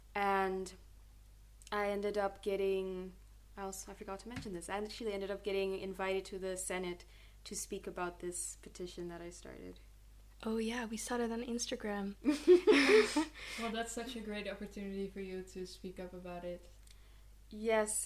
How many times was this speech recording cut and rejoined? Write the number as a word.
zero